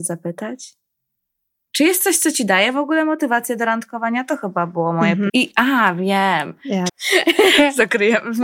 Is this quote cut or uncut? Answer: cut